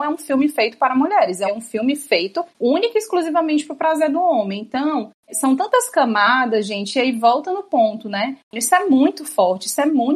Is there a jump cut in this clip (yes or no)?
yes